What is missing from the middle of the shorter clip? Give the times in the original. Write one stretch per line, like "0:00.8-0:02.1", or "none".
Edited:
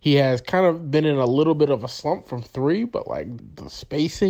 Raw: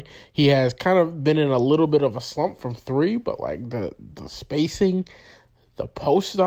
0:03.7-0:04.0